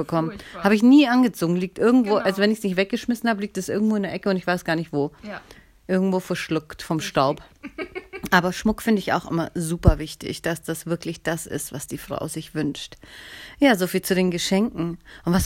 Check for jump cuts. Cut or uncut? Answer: uncut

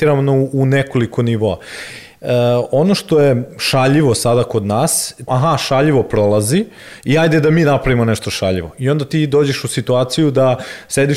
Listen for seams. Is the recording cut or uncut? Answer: cut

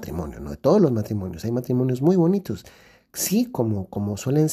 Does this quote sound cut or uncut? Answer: uncut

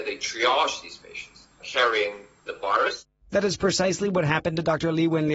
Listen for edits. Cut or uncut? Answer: cut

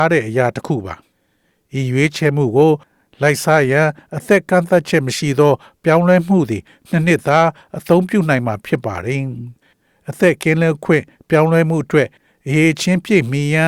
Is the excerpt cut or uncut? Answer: uncut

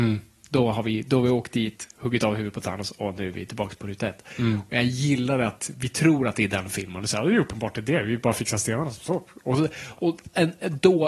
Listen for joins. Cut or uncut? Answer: uncut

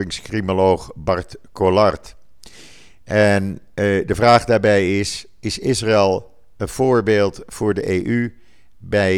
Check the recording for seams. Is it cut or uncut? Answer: uncut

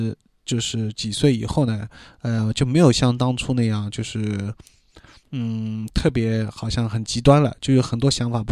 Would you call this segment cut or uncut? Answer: uncut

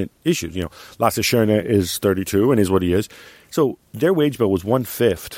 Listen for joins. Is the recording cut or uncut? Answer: uncut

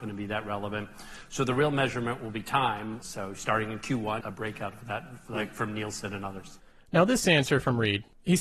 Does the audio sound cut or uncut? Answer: cut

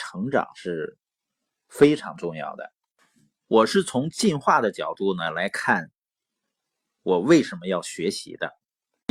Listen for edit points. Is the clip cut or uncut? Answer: uncut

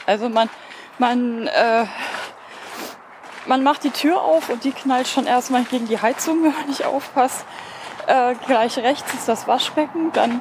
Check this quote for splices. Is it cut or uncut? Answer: uncut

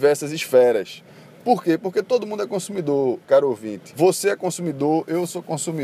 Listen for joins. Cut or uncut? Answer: uncut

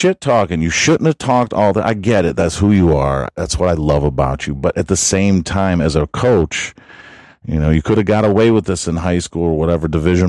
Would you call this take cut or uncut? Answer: uncut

